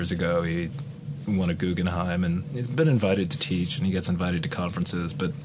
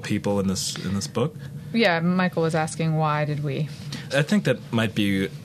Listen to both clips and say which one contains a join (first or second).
second